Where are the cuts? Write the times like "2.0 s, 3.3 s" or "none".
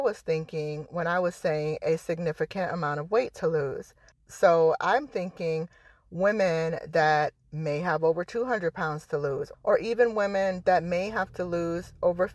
4.1 s, 9.5 s